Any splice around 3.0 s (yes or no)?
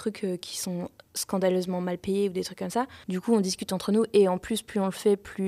yes